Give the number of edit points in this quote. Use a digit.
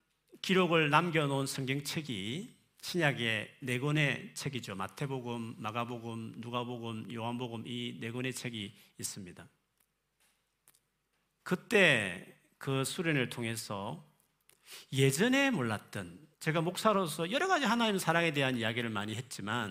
2